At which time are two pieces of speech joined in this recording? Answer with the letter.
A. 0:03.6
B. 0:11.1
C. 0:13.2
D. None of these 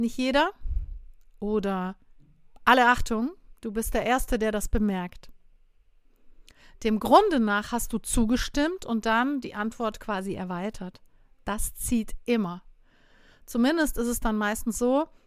D